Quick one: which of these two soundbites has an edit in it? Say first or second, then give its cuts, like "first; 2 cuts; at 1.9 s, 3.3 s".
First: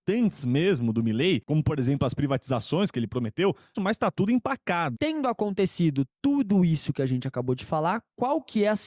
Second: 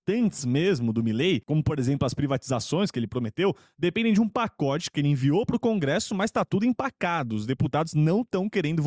first; 2 cuts; at 3.7 s, 4.9 s